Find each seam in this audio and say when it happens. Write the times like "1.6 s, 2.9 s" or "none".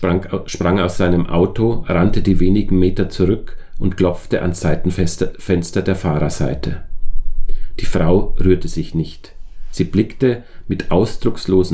none